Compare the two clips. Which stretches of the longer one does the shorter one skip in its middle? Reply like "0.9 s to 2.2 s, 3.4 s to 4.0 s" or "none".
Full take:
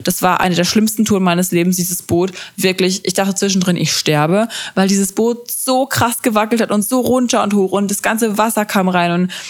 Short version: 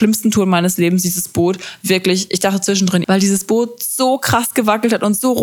3.8 s to 4.7 s